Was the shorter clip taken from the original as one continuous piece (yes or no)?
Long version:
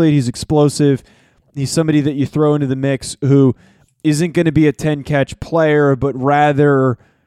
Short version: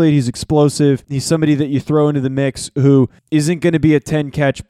no